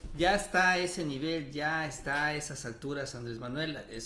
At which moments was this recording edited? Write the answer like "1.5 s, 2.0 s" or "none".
none

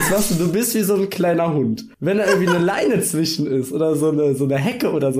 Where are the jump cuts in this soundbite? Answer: 1.9 s

